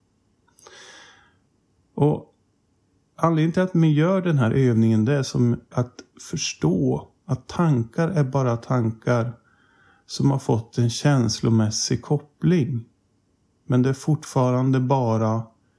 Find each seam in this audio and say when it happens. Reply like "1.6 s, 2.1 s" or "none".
5.7 s, 13.5 s